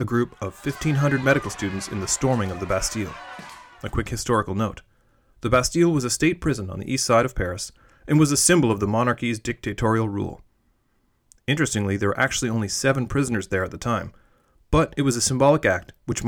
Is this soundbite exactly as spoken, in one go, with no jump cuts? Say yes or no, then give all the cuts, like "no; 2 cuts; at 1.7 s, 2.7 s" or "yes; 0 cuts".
yes; 0 cuts